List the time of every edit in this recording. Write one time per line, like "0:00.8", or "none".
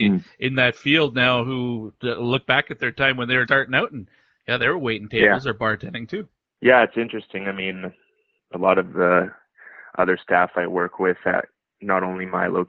0:03.5
0:08.4